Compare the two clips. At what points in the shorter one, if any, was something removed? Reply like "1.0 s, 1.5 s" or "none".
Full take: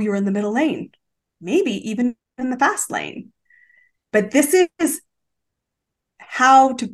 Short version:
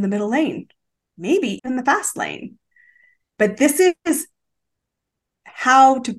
1.6 s

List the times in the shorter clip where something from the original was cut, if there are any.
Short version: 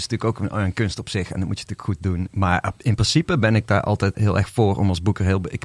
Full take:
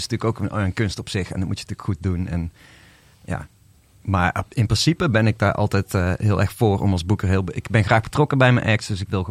2.3 s, 4.1 s

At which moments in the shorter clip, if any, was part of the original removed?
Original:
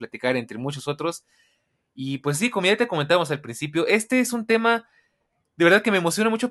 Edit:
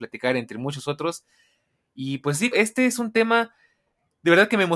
2.5 s

